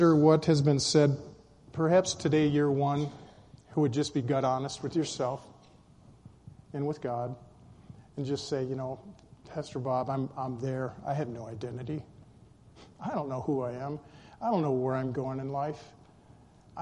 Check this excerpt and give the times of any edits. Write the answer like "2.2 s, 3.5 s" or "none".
none